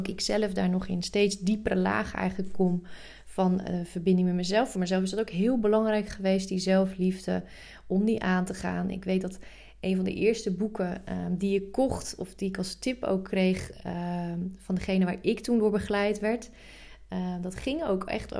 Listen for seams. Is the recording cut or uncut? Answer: uncut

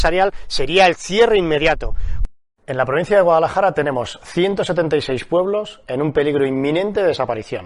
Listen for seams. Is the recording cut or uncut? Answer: uncut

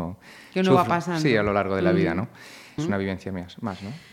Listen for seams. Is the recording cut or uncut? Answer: cut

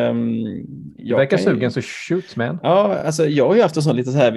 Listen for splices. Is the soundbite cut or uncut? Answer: uncut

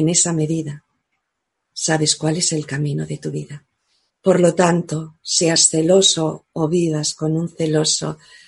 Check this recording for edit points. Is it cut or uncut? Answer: cut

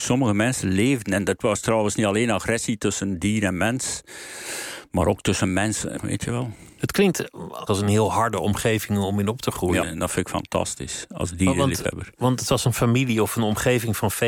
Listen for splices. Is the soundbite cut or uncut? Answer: cut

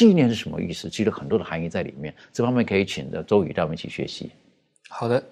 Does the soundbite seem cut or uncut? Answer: uncut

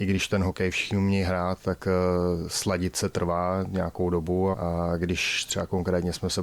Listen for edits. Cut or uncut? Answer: cut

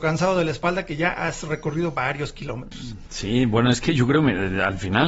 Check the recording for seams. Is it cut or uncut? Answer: uncut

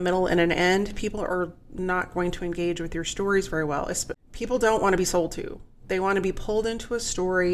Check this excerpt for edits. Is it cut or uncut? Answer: cut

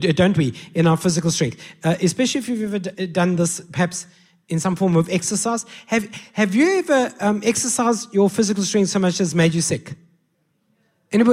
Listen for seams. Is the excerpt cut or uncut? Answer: uncut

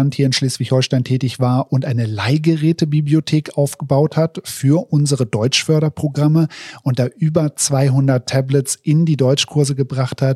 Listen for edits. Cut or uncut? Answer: uncut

